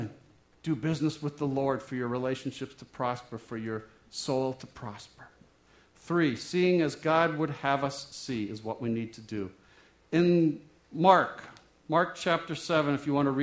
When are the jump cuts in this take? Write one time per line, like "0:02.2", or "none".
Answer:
none